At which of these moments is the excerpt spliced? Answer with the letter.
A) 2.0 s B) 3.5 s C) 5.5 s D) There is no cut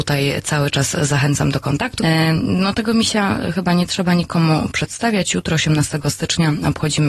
A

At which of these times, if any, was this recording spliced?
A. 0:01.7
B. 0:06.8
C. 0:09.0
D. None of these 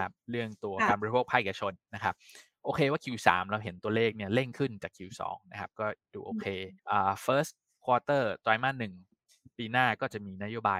B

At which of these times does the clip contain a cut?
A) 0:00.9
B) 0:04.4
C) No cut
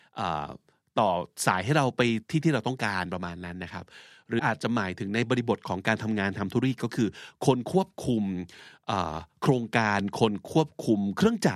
B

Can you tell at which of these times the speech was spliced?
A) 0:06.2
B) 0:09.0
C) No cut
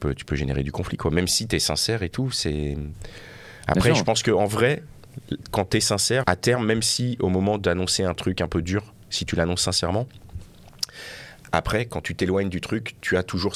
A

